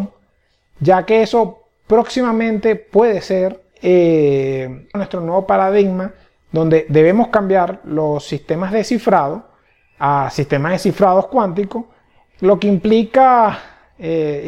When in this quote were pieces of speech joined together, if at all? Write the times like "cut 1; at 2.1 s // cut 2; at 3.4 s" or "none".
cut 1; at 3.7 s // cut 2; at 4.9 s